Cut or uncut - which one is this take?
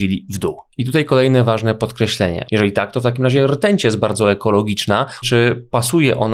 cut